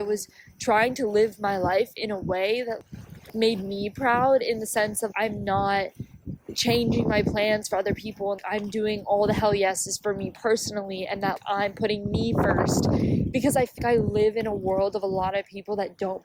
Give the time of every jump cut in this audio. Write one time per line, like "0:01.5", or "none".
0:05.1
0:13.8